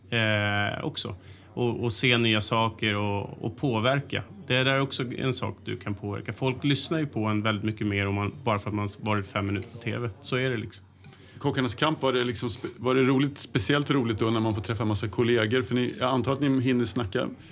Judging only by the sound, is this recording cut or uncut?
uncut